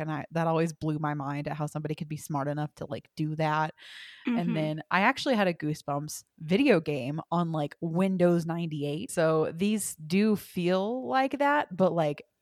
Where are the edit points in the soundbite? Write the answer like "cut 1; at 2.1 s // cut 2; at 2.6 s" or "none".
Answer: cut 1; at 9.1 s

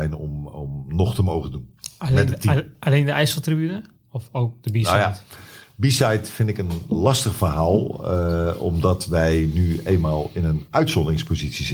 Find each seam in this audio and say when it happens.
none

